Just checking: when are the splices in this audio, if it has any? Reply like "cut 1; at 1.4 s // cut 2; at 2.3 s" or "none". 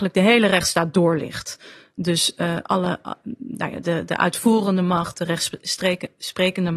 none